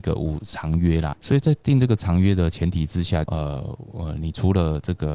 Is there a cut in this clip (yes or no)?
yes